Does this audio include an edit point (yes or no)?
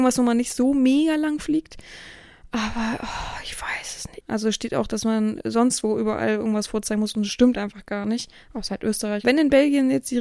yes